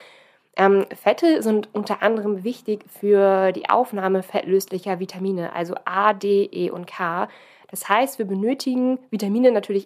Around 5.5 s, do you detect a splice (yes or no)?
no